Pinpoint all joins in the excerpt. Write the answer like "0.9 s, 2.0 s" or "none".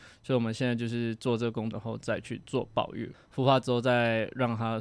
1.7 s, 3.1 s